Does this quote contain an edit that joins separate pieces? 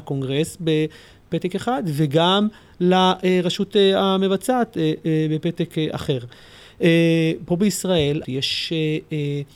yes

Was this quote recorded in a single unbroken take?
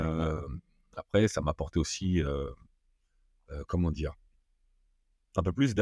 yes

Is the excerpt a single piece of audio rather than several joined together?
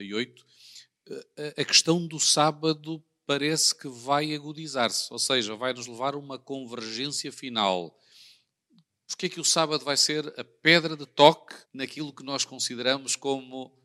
no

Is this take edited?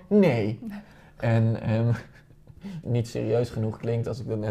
yes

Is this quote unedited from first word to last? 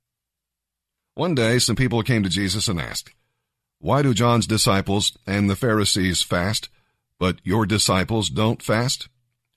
yes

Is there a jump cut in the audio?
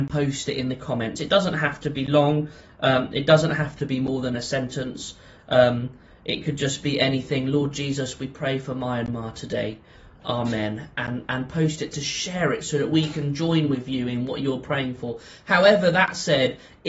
no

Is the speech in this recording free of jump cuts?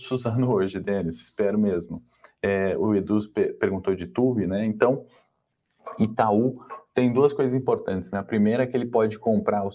yes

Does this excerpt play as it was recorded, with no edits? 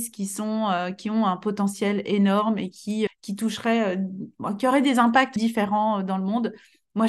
no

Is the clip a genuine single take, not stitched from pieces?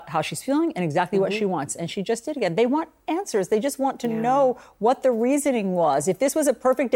yes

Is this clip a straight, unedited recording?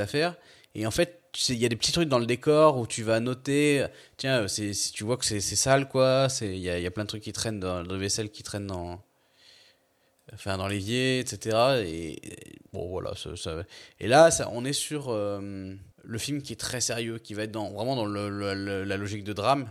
no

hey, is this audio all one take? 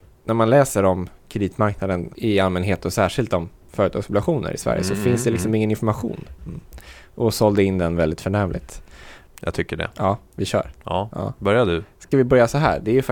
no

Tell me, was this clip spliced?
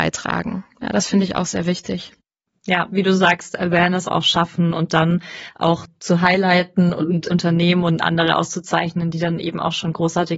yes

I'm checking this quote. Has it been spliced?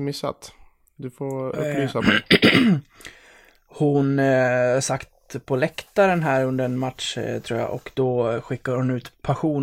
no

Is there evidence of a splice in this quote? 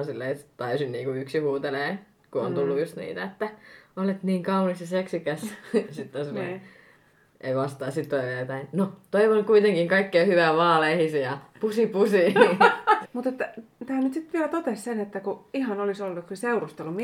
yes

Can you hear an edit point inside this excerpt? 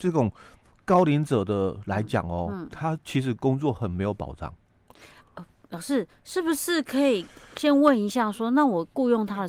no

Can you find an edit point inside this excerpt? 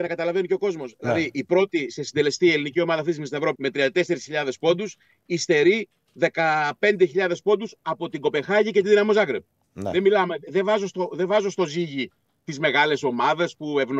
yes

